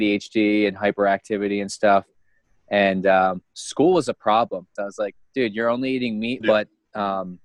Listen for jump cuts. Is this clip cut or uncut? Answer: cut